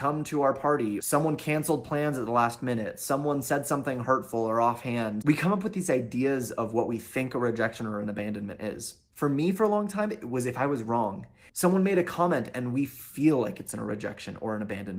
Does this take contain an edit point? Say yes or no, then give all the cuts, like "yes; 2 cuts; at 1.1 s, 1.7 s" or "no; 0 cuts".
yes; 2 cuts; at 5.2 s, 11.5 s